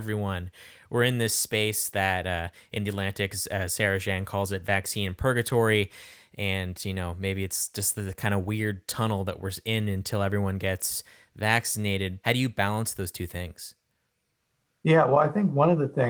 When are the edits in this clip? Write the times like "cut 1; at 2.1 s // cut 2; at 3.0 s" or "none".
cut 1; at 12.2 s